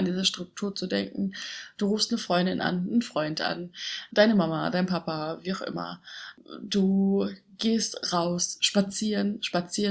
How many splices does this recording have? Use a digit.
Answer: 0